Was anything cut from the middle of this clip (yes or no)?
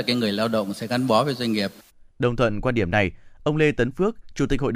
yes